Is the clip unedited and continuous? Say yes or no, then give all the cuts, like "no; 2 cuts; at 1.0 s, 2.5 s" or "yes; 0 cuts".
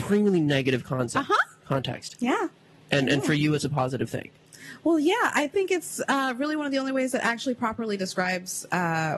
yes; 0 cuts